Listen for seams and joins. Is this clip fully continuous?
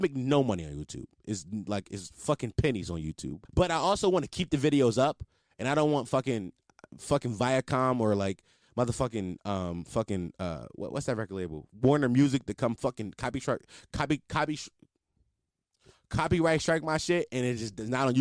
no; 1 cut; at 3.4 s

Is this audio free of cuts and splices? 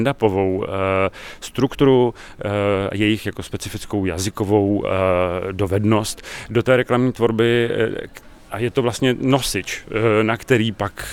yes; 0 cuts

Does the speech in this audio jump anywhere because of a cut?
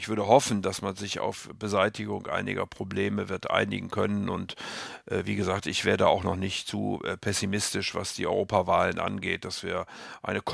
no; 0 cuts

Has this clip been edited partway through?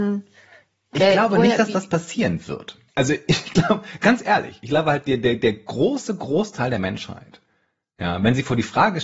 yes; 1 cut; at 2.9 s

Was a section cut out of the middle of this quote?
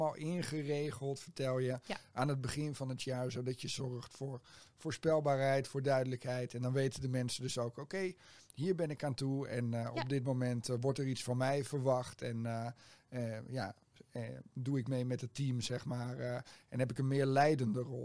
no; 0 cuts

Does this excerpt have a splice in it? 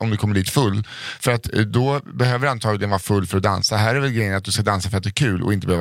no; 0 cuts

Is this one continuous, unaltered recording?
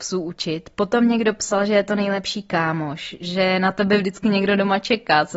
yes; 0 cuts

